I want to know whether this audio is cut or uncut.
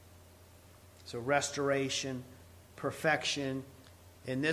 uncut